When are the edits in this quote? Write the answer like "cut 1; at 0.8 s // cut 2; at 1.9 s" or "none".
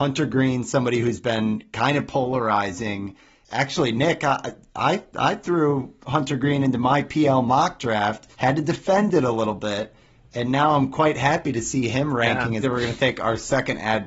cut 1; at 8.3 s // cut 2; at 12.6 s